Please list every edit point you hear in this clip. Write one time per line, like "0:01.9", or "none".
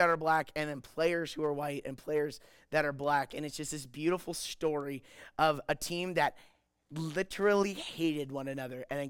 none